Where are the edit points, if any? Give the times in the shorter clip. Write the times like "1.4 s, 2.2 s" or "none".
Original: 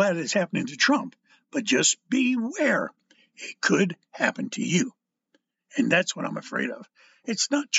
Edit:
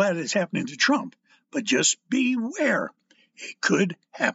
none